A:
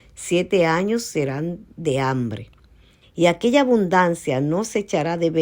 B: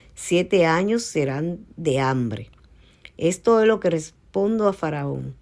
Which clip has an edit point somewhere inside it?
A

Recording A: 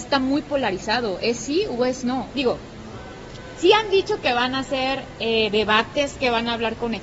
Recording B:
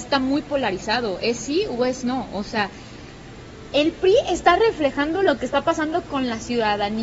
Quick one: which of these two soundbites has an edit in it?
A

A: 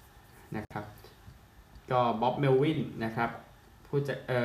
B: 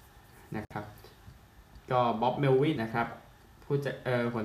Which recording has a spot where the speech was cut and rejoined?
B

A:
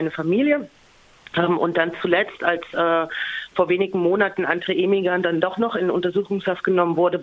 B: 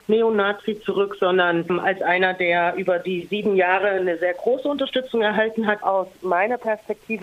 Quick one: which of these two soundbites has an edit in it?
B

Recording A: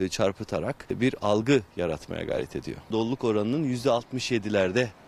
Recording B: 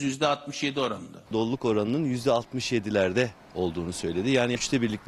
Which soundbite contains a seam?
B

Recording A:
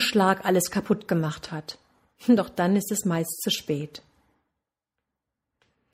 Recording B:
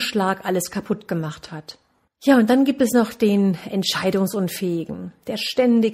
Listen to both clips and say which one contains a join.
B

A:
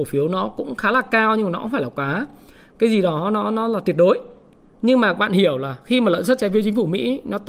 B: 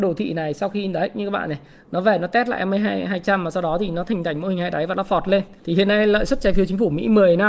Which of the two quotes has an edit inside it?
B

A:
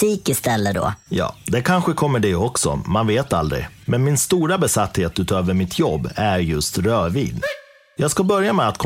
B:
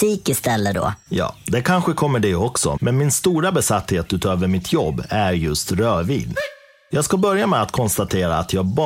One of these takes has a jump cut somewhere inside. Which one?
B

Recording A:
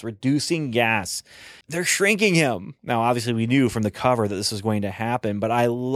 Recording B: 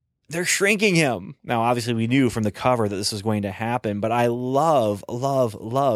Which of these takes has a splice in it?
A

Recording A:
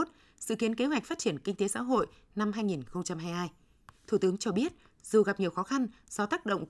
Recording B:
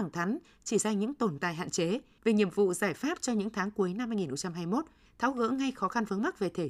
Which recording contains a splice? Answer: B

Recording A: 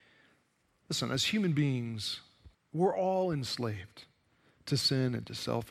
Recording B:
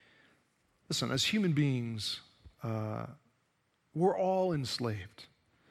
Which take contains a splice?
A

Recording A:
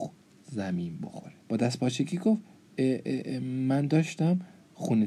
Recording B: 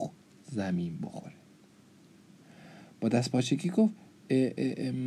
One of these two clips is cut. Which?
A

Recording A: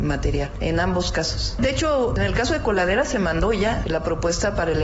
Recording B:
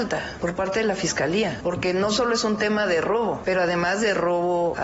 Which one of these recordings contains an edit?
B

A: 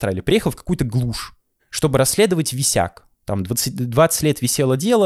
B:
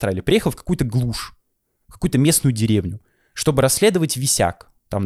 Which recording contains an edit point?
A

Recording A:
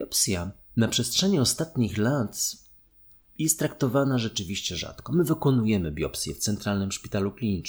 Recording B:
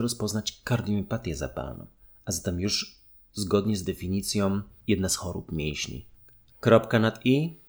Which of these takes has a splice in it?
B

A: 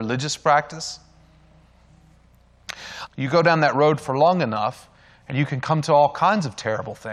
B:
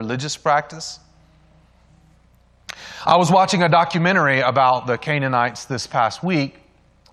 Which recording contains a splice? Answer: A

